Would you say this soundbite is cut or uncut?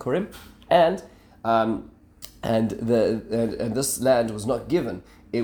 uncut